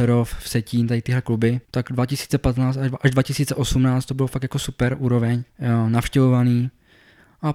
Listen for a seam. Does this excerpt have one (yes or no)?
yes